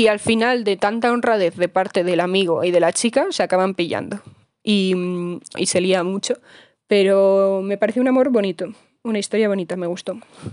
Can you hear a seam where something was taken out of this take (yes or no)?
yes